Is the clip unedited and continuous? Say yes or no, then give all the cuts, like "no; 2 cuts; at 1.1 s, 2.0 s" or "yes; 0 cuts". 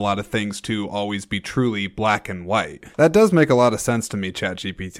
no; 1 cut; at 2.9 s